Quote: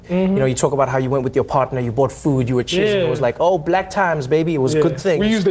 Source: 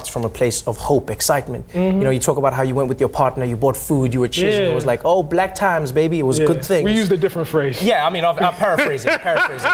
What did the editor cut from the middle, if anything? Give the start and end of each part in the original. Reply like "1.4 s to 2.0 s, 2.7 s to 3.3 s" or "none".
none